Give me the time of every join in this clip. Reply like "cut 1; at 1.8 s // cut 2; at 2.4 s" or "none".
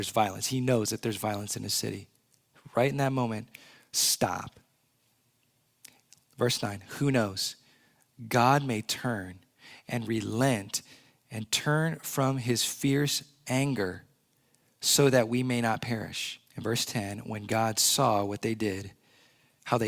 cut 1; at 16.5 s